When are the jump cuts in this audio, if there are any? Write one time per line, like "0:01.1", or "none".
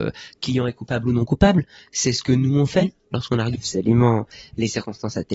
0:03.5